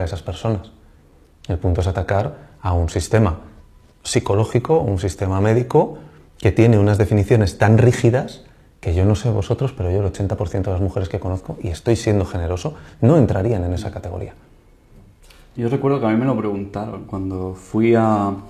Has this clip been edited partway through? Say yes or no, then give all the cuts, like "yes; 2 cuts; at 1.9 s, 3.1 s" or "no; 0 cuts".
no; 0 cuts